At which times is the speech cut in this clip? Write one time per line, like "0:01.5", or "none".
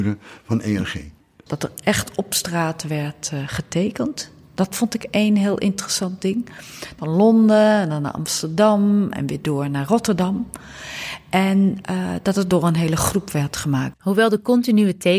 0:01.5
0:07.0
0:13.9